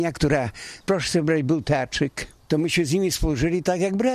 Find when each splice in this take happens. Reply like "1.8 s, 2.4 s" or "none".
2.5 s